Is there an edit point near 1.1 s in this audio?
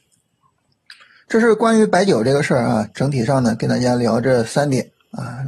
no; 0 cuts

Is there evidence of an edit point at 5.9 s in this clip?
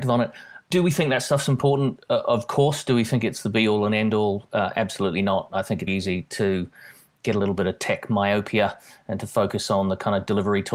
yes; 1 cut; at 5.9 s

